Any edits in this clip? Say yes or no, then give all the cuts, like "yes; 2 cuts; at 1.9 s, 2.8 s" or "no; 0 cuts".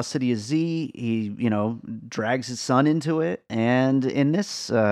no; 0 cuts